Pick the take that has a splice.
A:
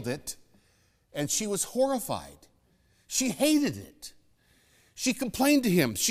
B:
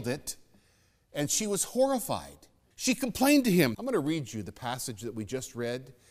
B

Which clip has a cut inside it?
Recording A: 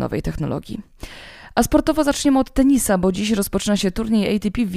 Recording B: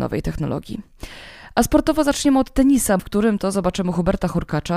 B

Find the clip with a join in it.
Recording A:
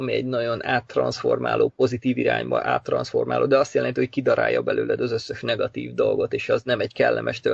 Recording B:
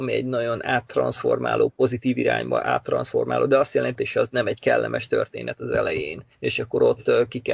B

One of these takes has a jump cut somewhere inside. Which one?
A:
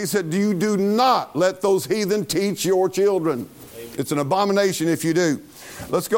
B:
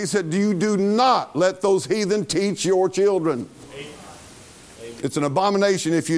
A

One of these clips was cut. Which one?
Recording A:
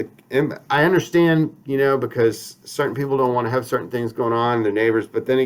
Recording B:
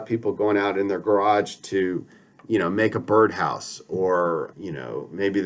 B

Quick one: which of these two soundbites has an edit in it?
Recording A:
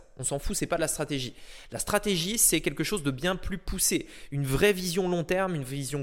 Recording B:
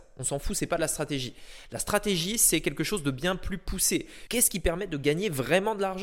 B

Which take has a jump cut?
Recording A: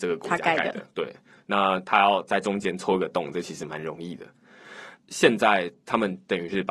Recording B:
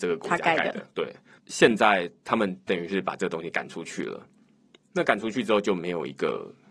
B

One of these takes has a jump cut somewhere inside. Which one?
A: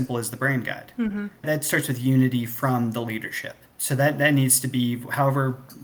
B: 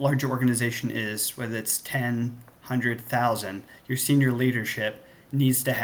A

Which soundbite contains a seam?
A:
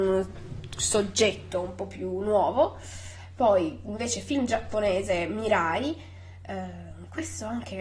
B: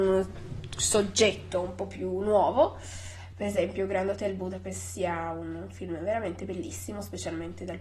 B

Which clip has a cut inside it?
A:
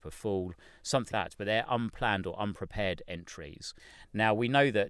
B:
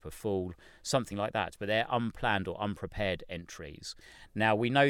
A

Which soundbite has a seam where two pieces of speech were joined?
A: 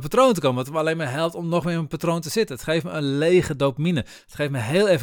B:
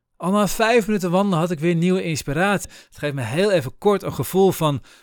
B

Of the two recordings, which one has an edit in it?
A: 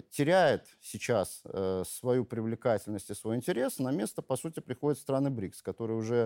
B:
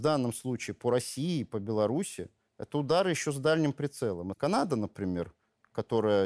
B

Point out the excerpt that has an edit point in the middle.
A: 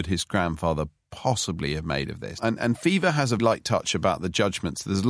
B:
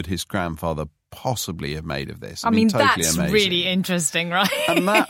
A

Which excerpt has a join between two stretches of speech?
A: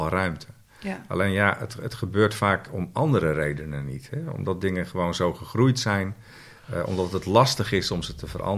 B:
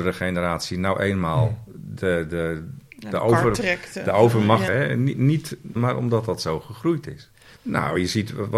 B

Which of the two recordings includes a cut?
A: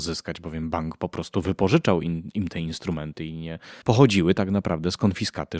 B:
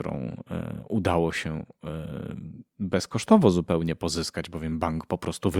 A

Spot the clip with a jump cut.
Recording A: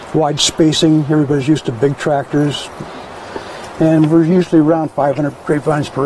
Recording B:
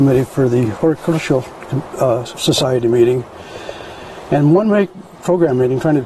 B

